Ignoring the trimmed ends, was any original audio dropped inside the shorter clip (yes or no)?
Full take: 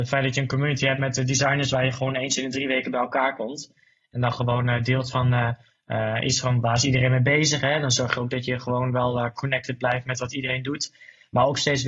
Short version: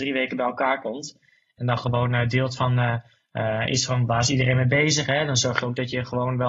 no